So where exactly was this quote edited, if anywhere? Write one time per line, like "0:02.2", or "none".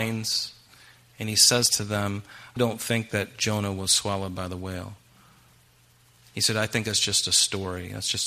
0:02.6